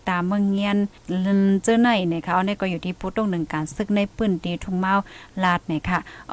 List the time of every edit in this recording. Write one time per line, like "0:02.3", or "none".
0:01.0